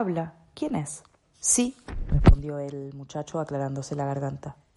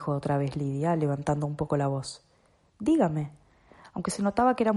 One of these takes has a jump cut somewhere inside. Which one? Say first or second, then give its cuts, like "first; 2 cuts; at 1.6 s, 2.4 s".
first; 1 cut; at 1.3 s